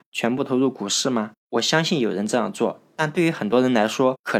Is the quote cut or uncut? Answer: uncut